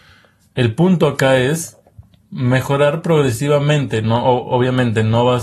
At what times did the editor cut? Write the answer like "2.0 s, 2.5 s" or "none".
none